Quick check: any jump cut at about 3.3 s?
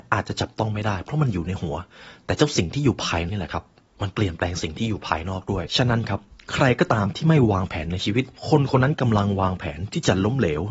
yes; 2 cuts; at 3.3 s, 8.4 s

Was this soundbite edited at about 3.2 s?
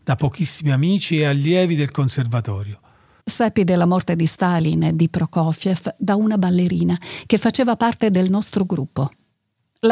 yes; 1 cut; at 3.2 s

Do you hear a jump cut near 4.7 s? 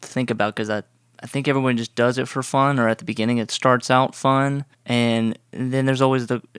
yes; 1 cut; at 4.7 s

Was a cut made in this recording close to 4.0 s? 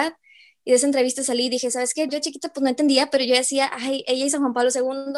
no; 1 cut; at 2.1 s

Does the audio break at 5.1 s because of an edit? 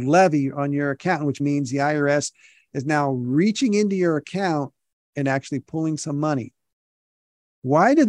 no; 1 cut; at 1.4 s

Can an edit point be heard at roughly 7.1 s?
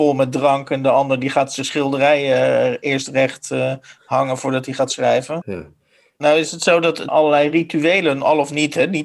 yes; 2 cuts; at 5.4 s, 7.1 s

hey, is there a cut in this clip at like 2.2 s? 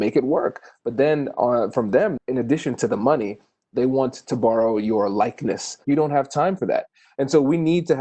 yes; 2 cuts; at 2.2 s, 5.8 s

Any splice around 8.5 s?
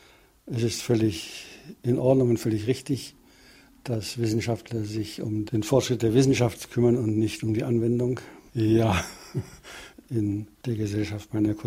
yes; 2 cuts; at 8.5 s, 9.9 s

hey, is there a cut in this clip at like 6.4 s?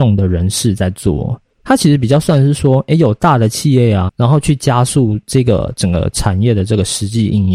no; 2 cuts; at 1.5 s, 4.1 s

